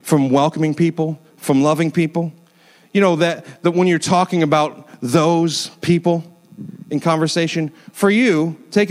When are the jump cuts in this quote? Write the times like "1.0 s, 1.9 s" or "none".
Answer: none